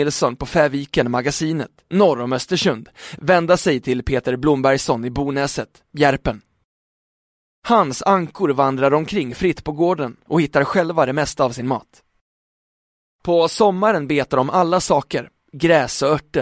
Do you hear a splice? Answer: no; 0 cuts

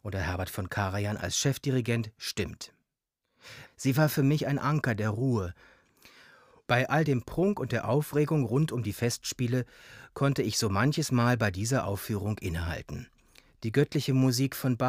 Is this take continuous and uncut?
no; 1 cut; at 3.7 s

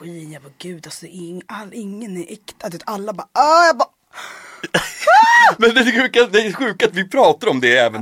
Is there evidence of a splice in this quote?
no; 0 cuts

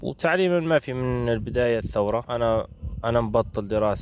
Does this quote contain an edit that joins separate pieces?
no; 0 cuts

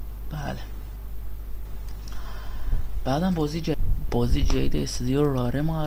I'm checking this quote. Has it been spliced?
no; 0 cuts

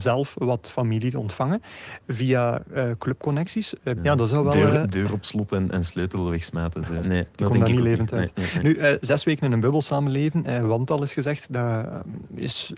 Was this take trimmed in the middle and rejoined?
yes; 2 cuts; at 4.0 s, 7.0 s

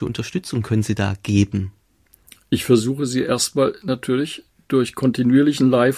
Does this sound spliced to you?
no; 0 cuts

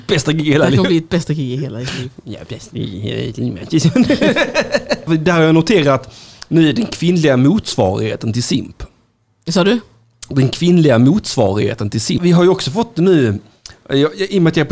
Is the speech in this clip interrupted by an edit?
yes; 2 cuts; at 5.1 s, 12.2 s

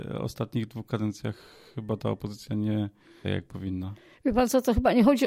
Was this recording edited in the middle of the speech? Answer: yes; 1 cut; at 3.2 s

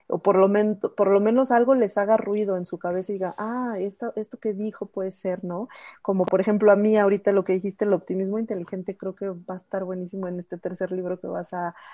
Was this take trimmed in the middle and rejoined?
no; 0 cuts

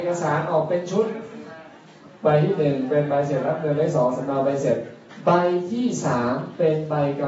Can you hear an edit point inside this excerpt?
no; 0 cuts

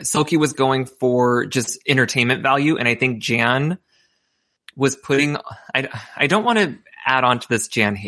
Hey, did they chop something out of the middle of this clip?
no; 0 cuts

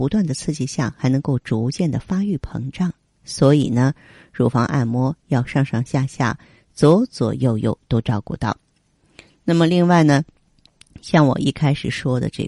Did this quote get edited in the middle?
no; 0 cuts

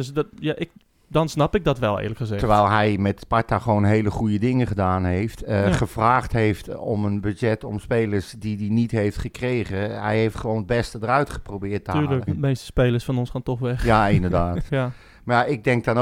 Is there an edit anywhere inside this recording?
yes; 2 cuts; at 12.3 s, 14.7 s

